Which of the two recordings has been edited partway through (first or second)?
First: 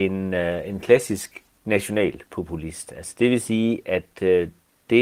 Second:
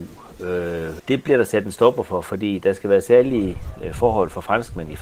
second